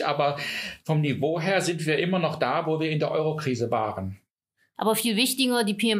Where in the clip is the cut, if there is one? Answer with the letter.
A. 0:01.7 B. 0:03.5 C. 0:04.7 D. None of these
C